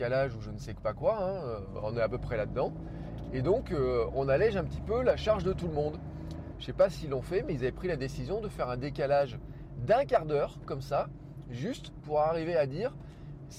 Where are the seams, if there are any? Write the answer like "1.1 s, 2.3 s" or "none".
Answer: 6.5 s